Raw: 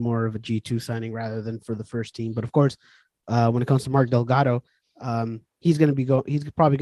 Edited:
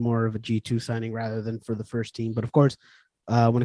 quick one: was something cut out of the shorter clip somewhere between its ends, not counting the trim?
no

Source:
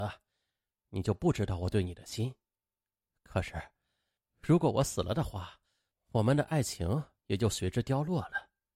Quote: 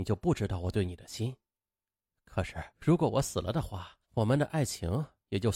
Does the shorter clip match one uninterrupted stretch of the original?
no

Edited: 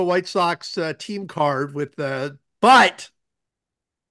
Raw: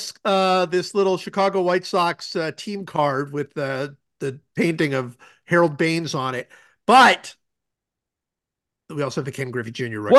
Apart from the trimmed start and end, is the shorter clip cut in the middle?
yes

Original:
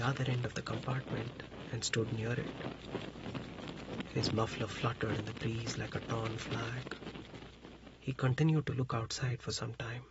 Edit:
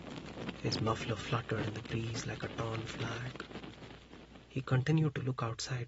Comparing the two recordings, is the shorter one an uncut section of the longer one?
yes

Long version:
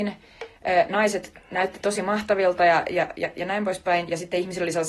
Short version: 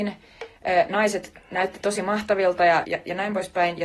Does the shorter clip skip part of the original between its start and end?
yes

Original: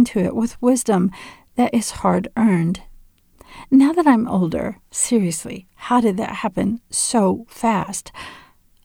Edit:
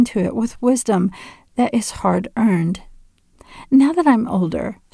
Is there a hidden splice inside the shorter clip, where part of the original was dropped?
no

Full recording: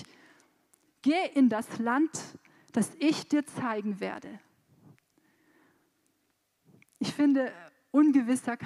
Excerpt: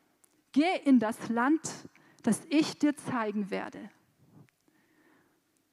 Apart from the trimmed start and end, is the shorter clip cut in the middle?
no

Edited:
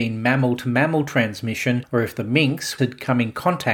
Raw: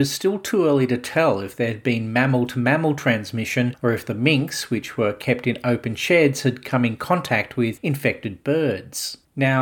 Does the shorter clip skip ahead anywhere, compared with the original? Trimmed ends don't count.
yes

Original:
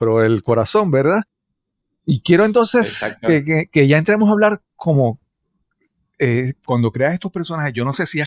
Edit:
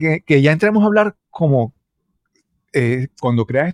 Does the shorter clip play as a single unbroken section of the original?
yes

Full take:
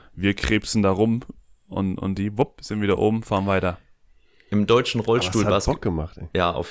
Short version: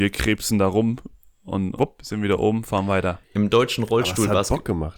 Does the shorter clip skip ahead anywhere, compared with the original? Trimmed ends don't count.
yes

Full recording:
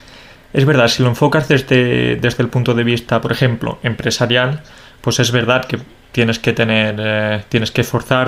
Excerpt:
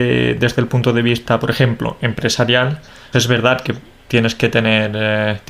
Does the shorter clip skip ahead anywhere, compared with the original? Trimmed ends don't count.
yes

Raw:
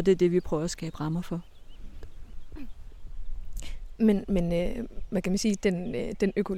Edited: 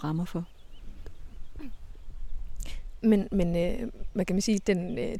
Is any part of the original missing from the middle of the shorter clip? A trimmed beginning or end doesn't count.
no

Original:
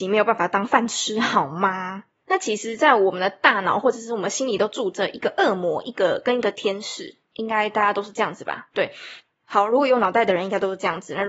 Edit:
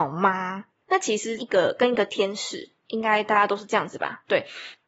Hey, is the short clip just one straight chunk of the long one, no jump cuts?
no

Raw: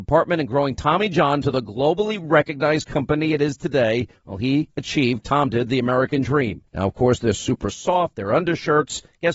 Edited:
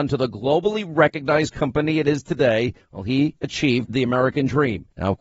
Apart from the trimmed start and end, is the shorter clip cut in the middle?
yes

